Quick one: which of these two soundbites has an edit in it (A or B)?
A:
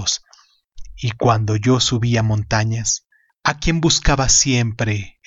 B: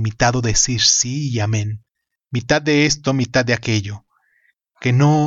B